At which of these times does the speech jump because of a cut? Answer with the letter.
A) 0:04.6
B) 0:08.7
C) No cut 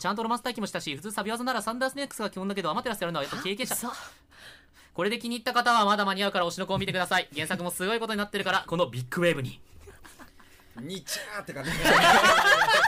B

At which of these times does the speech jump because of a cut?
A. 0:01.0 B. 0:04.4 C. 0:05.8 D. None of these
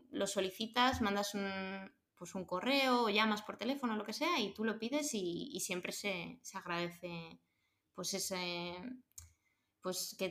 D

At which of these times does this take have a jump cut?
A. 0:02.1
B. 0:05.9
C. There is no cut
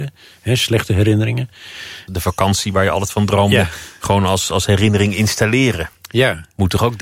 A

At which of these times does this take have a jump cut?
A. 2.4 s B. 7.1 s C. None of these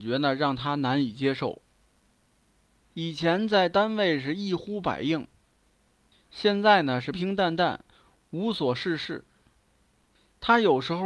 B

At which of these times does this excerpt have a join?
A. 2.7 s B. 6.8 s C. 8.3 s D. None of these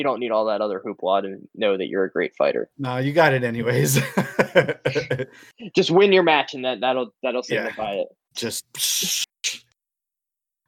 C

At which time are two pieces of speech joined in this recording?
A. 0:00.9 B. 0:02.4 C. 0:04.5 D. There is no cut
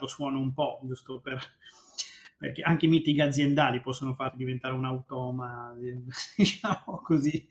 D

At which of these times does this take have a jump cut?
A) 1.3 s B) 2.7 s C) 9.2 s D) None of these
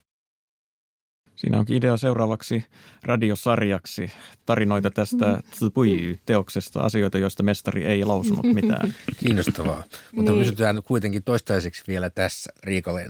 A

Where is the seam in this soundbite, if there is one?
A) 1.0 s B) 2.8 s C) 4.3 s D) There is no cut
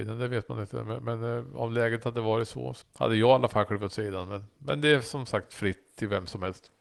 B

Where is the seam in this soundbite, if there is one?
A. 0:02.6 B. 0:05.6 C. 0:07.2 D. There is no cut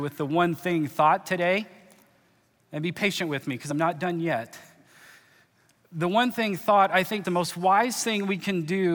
C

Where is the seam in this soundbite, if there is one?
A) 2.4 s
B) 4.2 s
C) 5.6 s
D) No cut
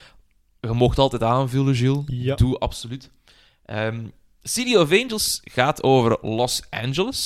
D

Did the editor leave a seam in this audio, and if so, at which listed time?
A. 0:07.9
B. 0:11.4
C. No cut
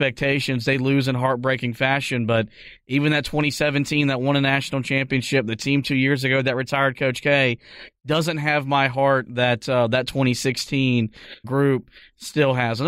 B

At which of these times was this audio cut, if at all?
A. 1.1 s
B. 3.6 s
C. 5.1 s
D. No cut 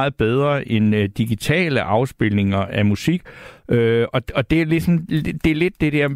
D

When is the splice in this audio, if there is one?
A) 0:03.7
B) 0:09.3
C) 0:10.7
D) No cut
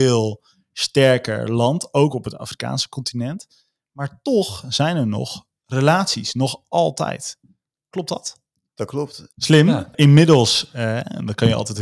B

